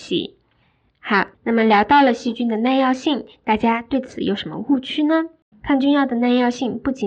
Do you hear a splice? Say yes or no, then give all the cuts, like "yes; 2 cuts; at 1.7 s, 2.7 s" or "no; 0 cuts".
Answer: yes; 2 cuts; at 1.3 s, 5.5 s